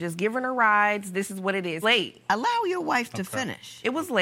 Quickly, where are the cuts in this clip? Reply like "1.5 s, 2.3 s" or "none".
1.8 s